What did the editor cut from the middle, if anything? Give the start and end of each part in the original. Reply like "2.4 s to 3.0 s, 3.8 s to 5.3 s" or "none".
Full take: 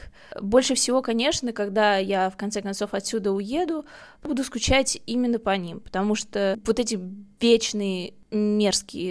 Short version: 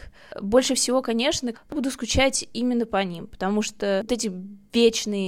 1.5 s to 4.1 s, 6.6 s to 6.7 s